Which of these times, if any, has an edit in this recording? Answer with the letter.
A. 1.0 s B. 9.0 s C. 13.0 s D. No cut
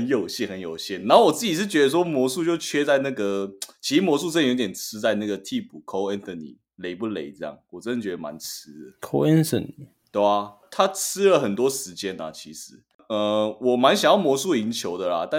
D